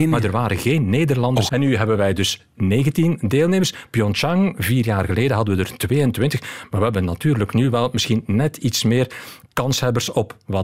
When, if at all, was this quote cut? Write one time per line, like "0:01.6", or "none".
0:01.5